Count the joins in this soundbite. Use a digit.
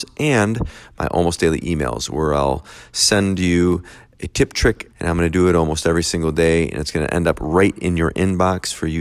1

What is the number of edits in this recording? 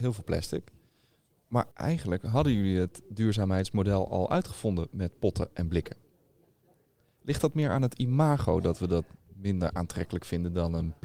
1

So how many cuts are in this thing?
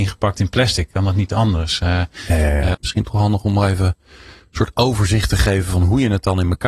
1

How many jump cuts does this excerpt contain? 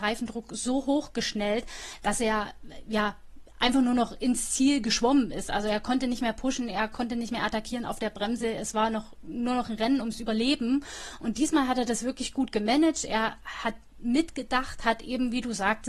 0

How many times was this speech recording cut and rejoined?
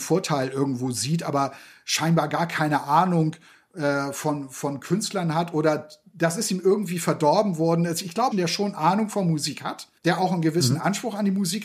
2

